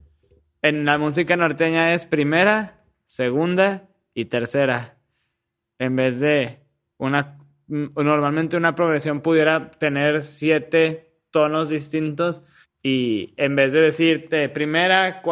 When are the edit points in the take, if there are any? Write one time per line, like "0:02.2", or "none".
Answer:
0:12.6